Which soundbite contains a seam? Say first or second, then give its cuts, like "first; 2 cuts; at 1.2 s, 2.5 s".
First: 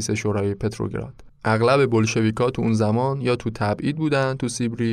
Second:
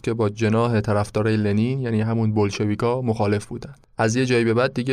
first; 1 cut; at 1.3 s